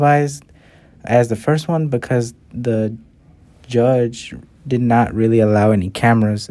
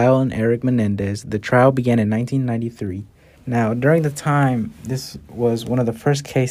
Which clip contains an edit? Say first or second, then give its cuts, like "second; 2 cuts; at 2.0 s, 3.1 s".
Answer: second; 1 cut; at 3.4 s